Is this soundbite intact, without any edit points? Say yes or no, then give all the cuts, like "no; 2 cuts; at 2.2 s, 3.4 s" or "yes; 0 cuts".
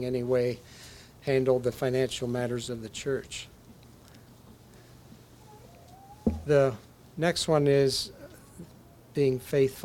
yes; 0 cuts